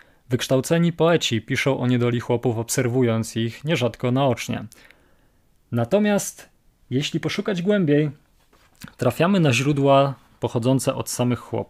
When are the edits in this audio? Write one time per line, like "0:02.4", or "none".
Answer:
none